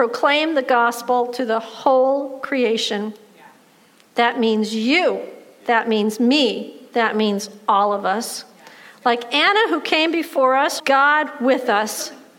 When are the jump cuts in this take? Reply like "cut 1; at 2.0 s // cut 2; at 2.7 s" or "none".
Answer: cut 1; at 10.8 s